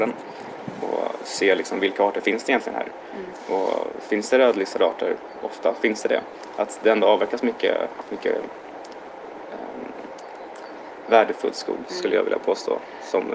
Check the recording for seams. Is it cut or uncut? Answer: cut